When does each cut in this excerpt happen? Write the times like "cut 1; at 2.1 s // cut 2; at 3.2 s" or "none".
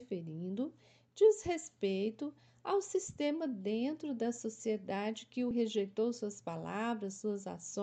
cut 1; at 5.5 s

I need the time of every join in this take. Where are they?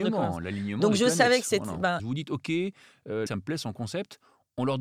cut 1; at 2.0 s // cut 2; at 3.3 s

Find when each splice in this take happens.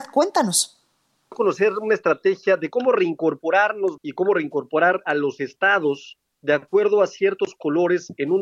cut 1; at 1.3 s // cut 2; at 4.0 s

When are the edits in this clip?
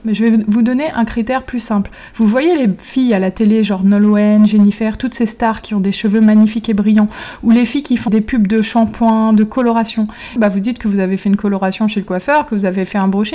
cut 1; at 8.1 s // cut 2; at 10.4 s

